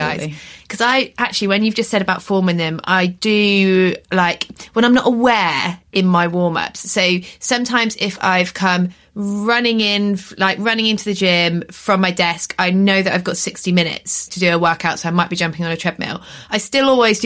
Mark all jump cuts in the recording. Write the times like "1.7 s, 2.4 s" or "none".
5.9 s